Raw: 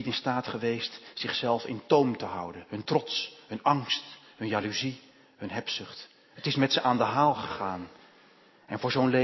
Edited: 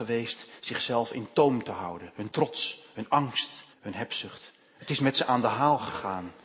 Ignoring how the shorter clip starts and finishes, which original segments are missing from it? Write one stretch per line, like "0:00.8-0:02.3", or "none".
0:04.2-0:05.3

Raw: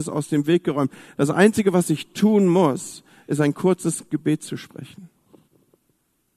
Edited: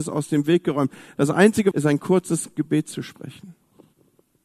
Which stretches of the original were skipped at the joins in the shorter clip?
0:01.7-0:03.3

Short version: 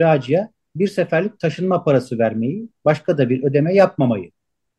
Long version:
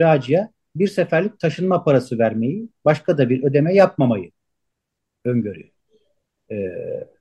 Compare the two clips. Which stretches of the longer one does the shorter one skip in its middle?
none

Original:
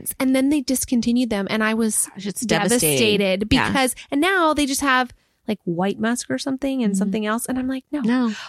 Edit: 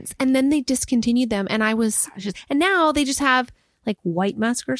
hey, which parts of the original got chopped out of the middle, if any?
0:02.3-0:03.9

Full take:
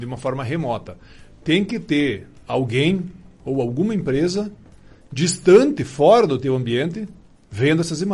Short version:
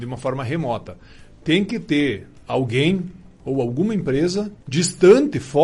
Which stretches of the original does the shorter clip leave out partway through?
0:04.6-0:05.0

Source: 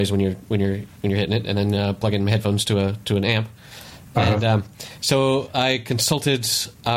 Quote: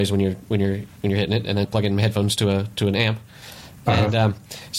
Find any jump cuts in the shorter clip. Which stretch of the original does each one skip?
0:01.6-0:01.9

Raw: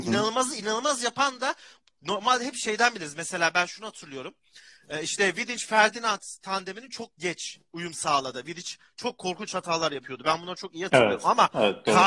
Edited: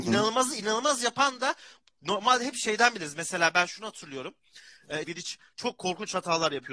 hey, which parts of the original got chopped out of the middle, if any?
0:05.0-0:08.4

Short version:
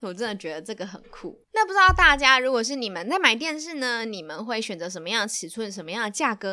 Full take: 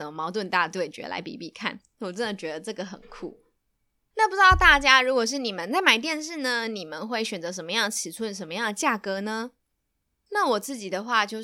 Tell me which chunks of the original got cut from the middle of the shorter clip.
0:03.4-0:04.1

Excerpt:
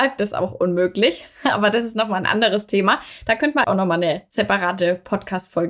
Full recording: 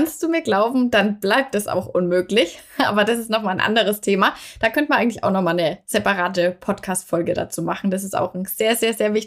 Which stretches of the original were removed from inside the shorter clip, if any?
0:05.0-0:05.2

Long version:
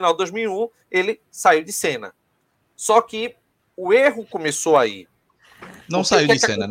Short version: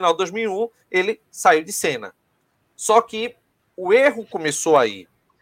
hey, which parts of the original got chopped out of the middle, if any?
none

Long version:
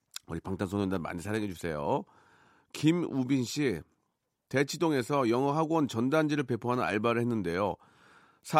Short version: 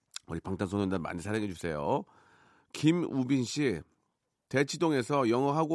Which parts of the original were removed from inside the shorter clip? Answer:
none

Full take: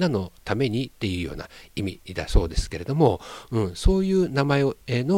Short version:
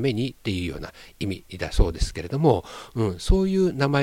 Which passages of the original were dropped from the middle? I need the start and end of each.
none

